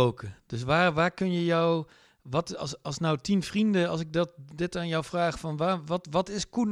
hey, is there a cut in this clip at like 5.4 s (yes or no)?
no